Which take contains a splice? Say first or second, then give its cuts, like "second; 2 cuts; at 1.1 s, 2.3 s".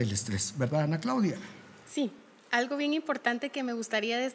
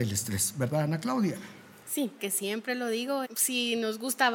second; 2 cuts; at 2.2 s, 3.2 s